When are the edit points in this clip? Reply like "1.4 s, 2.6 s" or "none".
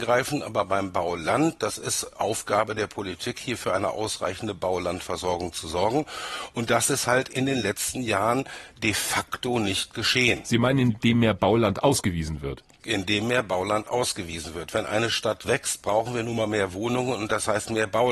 none